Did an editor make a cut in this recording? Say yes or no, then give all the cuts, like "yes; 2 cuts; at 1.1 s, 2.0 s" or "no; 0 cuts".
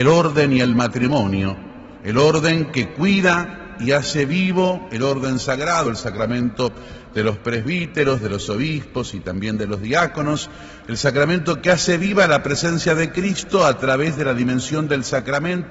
no; 0 cuts